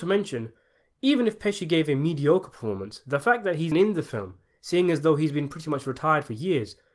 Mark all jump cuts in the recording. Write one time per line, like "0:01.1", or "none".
0:03.7